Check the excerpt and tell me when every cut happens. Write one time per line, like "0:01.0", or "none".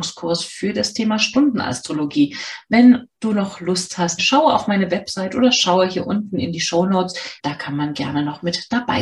0:04.2
0:07.4